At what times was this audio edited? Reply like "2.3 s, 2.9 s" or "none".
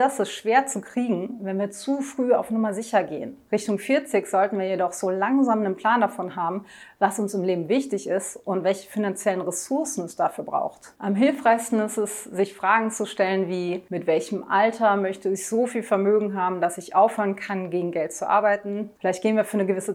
19.0 s